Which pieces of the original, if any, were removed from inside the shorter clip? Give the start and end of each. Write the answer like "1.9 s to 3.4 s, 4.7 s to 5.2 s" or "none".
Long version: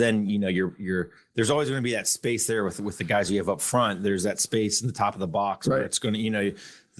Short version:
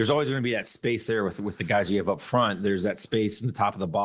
none